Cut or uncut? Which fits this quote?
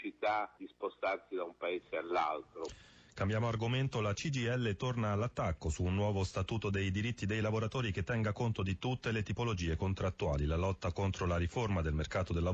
uncut